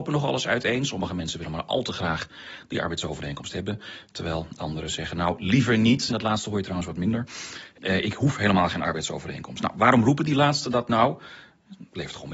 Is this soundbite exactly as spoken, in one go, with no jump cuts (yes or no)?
no